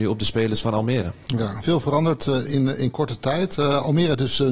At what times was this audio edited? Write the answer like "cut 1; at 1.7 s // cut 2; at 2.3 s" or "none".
cut 1; at 1.6 s